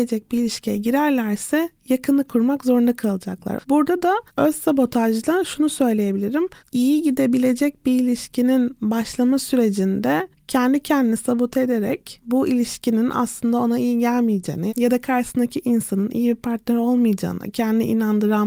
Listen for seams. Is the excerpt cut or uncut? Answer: cut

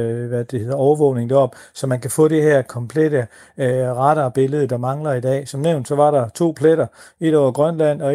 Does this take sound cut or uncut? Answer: uncut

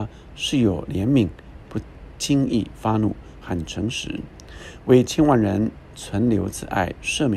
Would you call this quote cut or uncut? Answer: cut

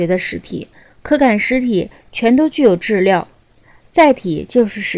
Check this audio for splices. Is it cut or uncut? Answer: uncut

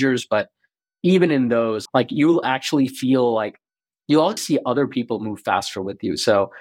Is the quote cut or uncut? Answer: cut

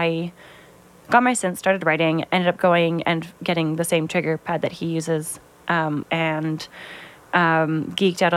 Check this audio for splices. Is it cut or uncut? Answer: cut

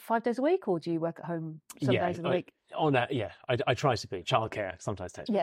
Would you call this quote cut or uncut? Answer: uncut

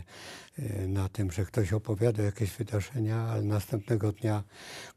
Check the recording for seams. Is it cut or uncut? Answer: uncut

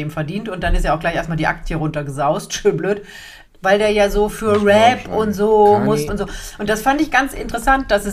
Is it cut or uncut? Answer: cut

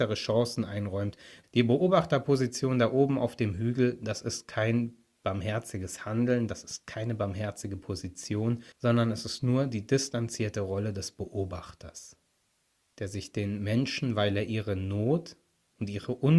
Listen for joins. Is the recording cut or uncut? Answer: cut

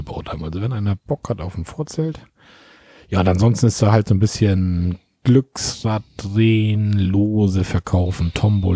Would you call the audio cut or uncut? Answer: uncut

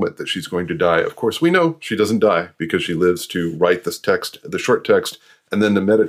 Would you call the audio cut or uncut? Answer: uncut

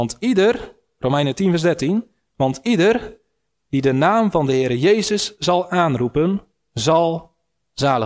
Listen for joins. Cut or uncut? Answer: uncut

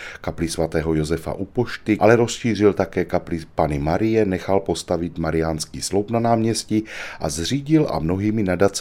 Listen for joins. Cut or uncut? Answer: cut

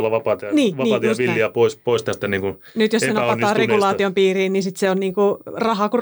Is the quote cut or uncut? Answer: uncut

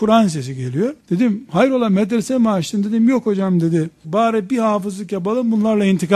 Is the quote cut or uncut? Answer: cut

